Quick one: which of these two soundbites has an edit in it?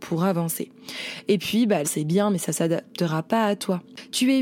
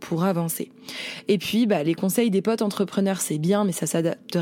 first; 1 cut; at 1.8 s

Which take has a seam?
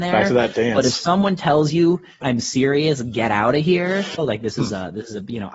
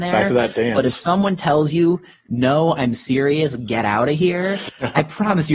first; 2 cuts; at 2.2 s, 4.2 s

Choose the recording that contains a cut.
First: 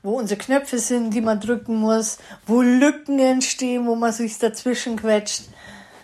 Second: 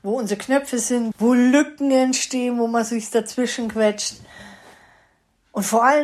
second; 1 cut; at 1.1 s

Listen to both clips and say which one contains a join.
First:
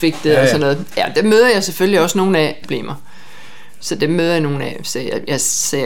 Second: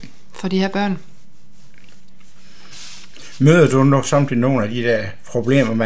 first; 1 cut; at 2.6 s

